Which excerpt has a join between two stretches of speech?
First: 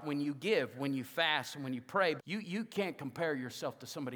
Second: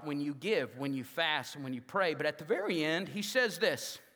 first; 1 cut; at 2.2 s

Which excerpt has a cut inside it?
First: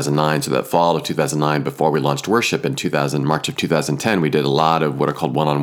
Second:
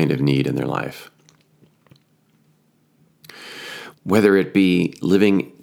second; 1 cut; at 3.9 s

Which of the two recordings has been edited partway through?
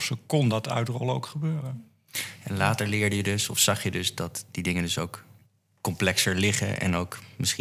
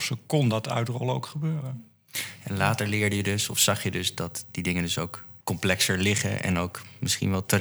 second; 1 cut; at 5.4 s

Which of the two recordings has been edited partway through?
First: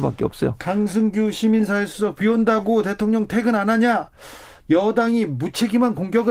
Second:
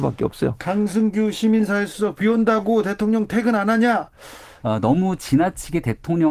second; 1 cut; at 4.6 s

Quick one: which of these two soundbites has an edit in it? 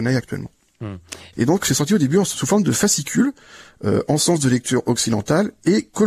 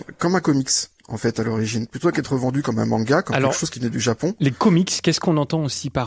first; 1 cut; at 1.3 s

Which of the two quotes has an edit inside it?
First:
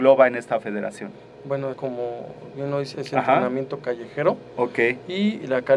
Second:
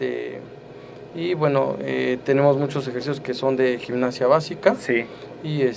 first; 2 cuts; at 1.7 s, 2.9 s

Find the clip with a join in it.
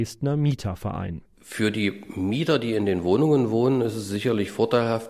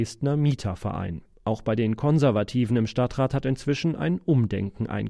second; 1 cut; at 1.3 s

